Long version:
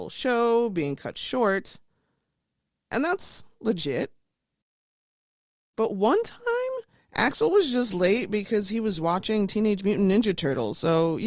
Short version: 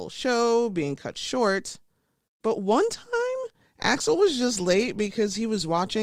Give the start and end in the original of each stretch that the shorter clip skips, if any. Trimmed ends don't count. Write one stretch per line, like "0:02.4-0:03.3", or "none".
0:02.3-0:05.6